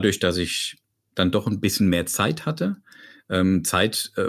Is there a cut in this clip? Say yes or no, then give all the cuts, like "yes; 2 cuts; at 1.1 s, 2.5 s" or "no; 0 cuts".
no; 0 cuts